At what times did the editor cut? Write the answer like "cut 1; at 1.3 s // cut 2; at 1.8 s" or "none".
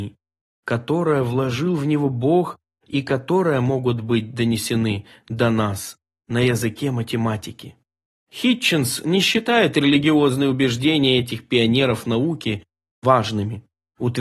none